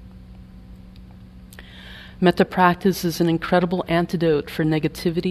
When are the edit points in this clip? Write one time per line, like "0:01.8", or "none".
none